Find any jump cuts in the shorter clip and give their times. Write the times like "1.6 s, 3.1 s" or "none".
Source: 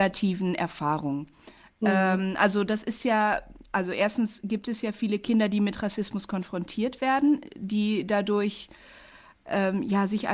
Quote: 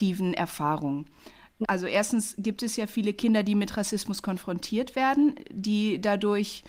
1.6 s